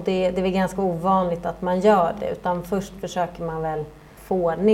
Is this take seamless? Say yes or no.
yes